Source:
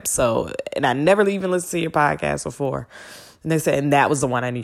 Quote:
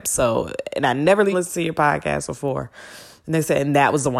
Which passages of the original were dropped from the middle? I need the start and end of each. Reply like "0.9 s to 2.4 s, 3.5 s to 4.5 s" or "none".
1.3 s to 1.5 s